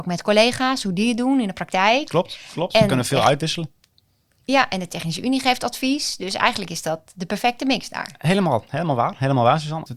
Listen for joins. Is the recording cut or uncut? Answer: uncut